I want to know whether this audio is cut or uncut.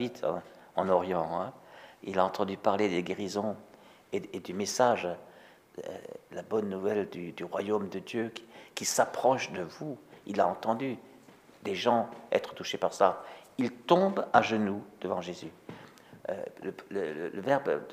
uncut